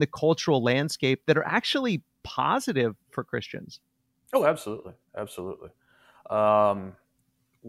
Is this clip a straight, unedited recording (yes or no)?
yes